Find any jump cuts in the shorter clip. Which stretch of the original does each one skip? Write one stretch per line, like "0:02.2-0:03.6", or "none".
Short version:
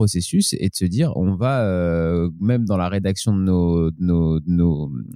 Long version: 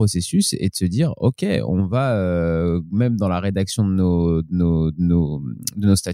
0:01.2-0:01.7